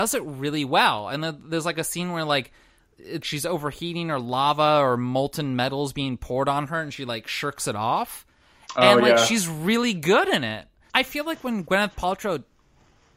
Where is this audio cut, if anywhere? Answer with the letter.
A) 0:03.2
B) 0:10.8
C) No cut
A